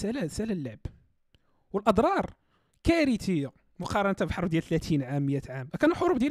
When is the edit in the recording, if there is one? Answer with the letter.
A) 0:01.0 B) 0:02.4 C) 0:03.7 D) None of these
D